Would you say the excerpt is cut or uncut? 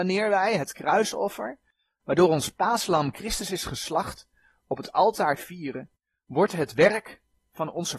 uncut